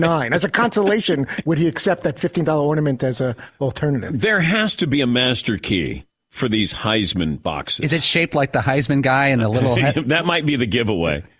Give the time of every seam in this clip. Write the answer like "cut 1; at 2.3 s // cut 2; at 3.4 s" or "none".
cut 1; at 1.4 s